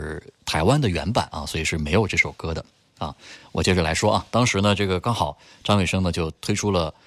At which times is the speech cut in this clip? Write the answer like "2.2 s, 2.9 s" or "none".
none